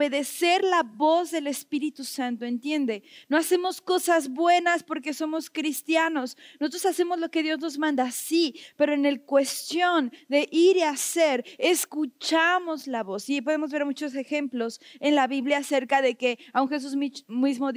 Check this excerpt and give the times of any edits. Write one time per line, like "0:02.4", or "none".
none